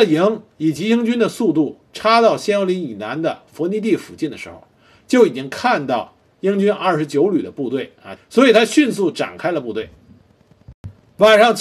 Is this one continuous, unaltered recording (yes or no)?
no